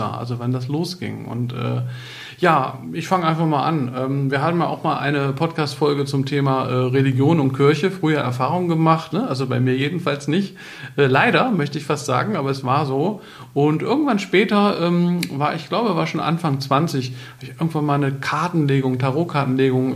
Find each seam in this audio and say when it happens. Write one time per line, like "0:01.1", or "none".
0:09.1